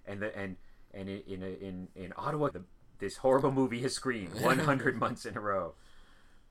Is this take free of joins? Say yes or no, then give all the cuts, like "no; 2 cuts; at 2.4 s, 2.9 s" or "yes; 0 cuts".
no; 1 cut; at 2.5 s